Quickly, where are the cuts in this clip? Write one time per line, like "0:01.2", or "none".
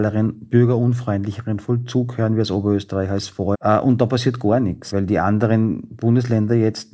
0:03.5
0:04.9